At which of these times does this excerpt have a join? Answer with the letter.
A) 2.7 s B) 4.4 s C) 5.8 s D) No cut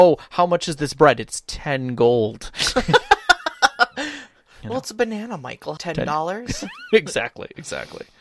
C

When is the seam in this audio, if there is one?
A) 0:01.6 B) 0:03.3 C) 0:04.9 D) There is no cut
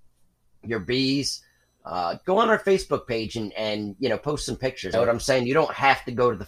C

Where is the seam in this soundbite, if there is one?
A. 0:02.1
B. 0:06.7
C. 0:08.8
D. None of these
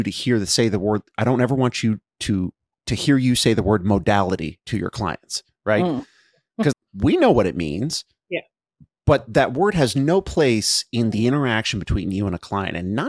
B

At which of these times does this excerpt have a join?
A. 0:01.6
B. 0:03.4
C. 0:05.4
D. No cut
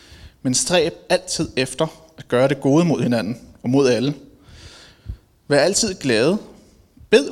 D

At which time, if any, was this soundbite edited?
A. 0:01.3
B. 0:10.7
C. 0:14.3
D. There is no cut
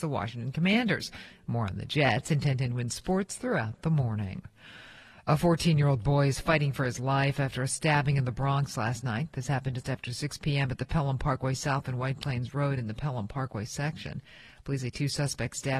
A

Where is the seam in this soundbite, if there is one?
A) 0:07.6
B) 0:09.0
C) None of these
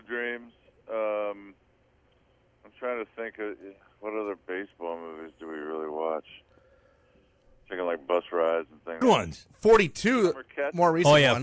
B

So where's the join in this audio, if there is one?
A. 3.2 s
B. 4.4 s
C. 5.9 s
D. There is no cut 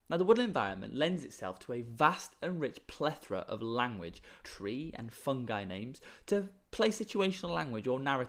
B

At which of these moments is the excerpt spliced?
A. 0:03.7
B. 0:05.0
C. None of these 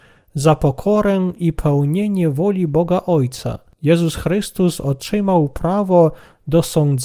A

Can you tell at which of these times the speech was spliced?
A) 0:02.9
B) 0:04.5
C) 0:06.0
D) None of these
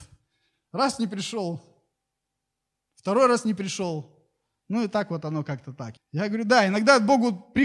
C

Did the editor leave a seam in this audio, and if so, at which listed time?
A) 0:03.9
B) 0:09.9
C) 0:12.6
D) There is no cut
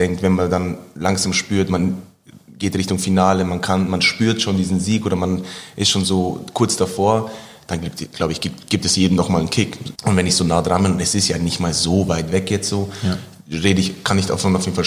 B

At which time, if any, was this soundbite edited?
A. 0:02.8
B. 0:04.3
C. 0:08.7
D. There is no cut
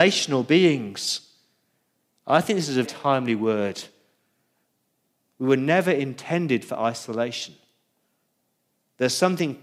A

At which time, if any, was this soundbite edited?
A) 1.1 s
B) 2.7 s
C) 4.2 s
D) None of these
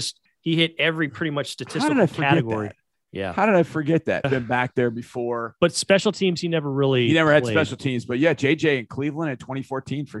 C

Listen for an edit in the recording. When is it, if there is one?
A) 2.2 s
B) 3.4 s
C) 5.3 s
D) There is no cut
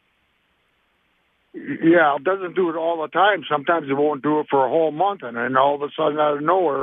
A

